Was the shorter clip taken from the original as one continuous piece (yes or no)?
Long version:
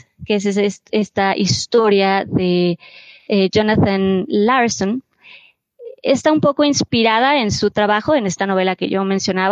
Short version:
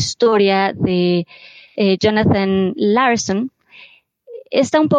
yes